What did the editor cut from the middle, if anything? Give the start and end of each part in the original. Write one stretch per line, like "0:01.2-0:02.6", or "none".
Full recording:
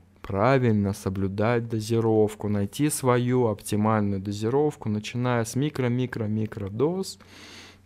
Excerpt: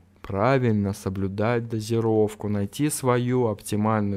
none